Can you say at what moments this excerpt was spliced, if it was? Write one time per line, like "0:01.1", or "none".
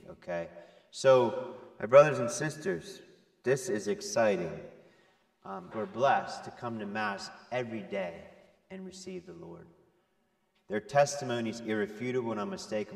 0:05.7
0:10.5